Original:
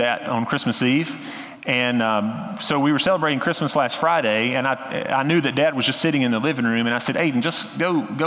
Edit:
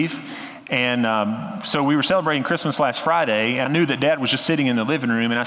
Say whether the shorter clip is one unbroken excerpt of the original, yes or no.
no